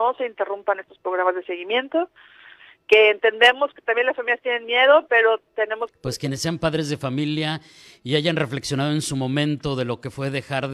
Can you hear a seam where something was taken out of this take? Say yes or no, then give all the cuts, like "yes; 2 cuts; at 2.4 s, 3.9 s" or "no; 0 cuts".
yes; 1 cut; at 5.9 s